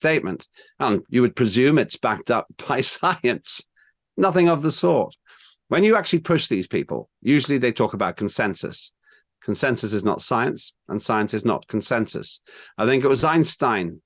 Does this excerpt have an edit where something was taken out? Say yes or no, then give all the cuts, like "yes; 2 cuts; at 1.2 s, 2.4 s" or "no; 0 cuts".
no; 0 cuts